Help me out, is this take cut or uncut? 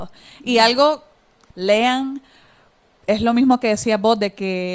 cut